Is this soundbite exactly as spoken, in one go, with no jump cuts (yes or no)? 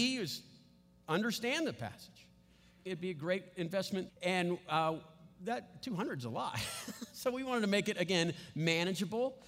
no